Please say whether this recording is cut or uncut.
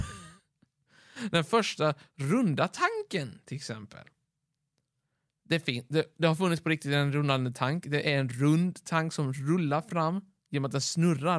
uncut